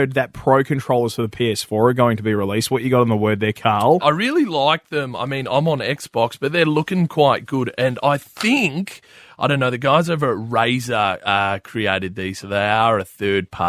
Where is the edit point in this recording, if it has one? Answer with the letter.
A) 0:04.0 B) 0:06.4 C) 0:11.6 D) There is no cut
A